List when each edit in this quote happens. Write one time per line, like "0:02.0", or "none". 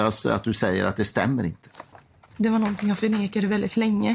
0:02.2